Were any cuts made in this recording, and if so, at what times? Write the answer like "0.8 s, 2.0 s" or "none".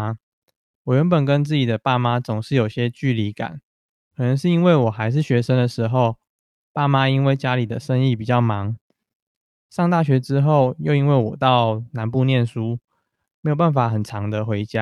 none

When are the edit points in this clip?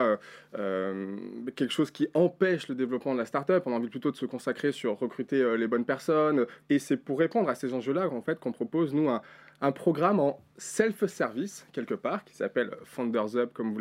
6.6 s

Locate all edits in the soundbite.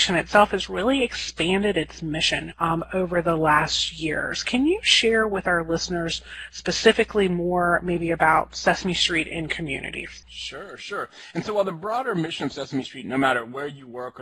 none

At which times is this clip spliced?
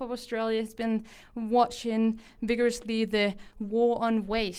none

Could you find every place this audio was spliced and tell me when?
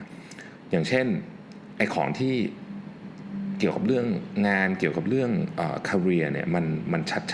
none

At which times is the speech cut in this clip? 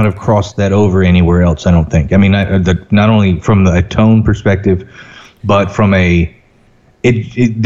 none

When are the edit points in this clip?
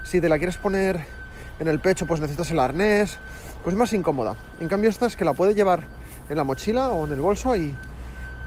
none

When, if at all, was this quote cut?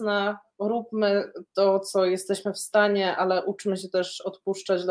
3.2 s

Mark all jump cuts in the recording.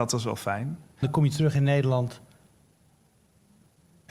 1.0 s

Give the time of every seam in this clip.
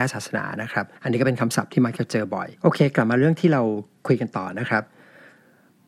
0.9 s, 2.6 s

